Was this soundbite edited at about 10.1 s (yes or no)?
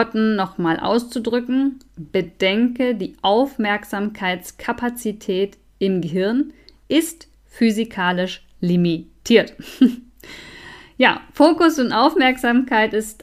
no